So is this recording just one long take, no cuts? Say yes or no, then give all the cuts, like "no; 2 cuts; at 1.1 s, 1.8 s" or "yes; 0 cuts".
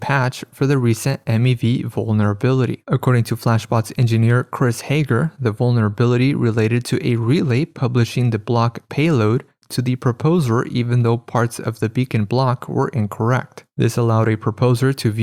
yes; 0 cuts